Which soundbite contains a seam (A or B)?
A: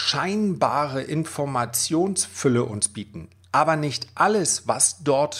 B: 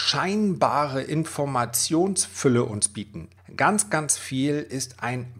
B